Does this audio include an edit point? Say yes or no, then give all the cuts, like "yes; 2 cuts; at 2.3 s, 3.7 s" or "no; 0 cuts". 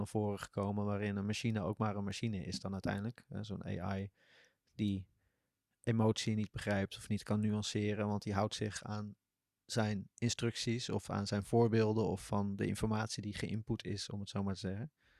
no; 0 cuts